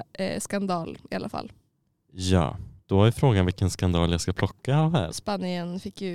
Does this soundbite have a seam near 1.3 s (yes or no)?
no